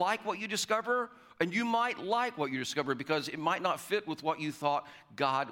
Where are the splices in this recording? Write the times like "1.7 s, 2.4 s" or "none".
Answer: none